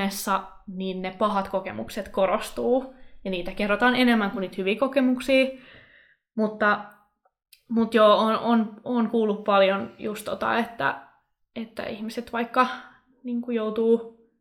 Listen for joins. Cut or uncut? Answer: uncut